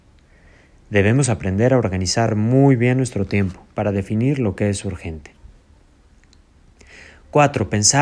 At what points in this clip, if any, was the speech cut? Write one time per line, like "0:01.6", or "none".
none